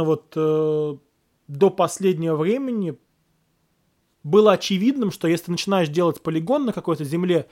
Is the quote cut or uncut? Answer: uncut